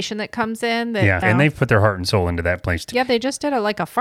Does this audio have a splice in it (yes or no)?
yes